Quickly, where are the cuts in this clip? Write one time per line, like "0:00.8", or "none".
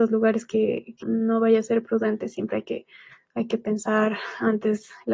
0:01.0